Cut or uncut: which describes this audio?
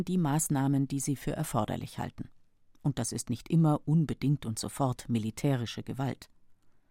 uncut